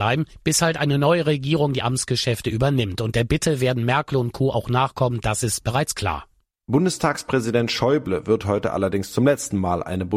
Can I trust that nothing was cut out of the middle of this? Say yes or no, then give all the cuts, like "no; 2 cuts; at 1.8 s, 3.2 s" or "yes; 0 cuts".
yes; 0 cuts